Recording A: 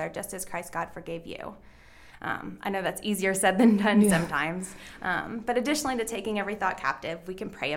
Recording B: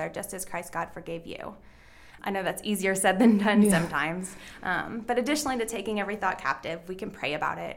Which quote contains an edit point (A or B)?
B